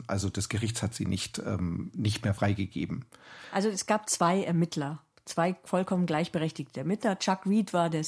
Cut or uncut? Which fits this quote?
uncut